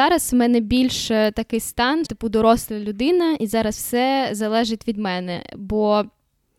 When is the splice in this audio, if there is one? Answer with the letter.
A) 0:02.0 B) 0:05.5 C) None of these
A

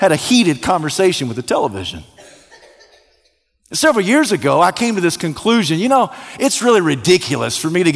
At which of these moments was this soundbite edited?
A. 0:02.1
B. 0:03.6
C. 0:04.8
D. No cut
D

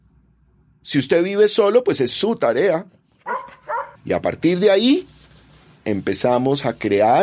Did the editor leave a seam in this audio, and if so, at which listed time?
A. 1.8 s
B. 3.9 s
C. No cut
B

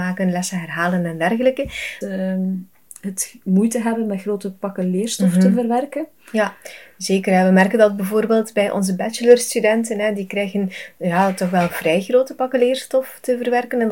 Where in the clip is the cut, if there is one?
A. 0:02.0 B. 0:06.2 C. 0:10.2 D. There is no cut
A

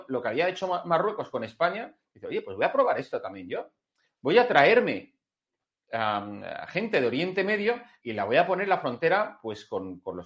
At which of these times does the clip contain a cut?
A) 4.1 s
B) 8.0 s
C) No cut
B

